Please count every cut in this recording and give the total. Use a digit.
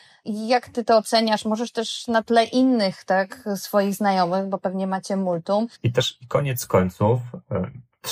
1